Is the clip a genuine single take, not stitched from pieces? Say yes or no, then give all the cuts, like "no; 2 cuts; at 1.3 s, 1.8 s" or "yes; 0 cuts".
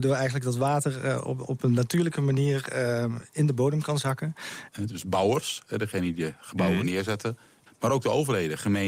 no; 2 cuts; at 4.7 s, 7.7 s